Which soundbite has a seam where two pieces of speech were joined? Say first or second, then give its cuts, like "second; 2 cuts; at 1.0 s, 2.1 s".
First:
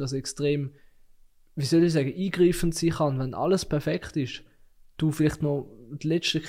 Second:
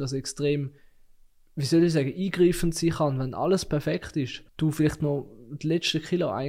second; 1 cut; at 4.5 s